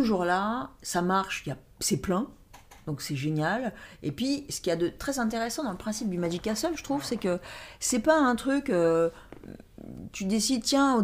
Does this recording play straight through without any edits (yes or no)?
yes